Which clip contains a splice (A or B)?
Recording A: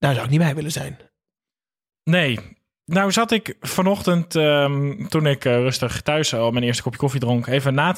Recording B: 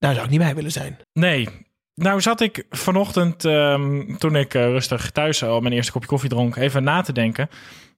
B